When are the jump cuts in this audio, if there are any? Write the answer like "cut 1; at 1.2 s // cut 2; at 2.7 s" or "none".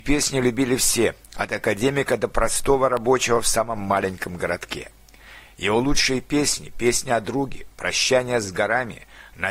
cut 1; at 5.5 s